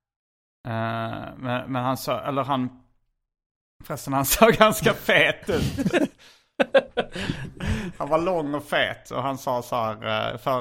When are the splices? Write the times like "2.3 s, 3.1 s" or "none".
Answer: none